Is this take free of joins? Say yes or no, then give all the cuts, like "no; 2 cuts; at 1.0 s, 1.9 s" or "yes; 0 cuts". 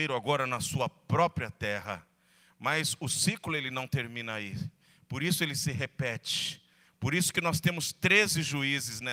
yes; 0 cuts